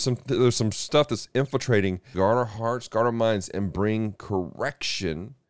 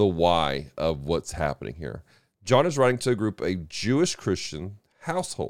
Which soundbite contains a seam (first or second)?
first